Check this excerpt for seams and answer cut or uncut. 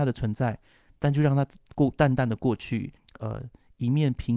cut